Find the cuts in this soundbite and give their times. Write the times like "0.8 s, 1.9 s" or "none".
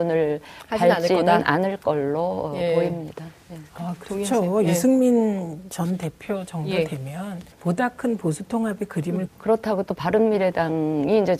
7.5 s, 9.3 s